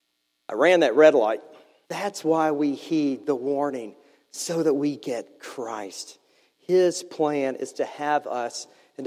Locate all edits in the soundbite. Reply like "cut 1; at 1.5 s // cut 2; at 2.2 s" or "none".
cut 1; at 1.8 s